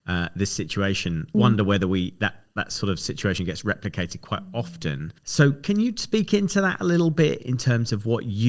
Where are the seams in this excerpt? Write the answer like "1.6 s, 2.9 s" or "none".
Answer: 1.3 s, 5.2 s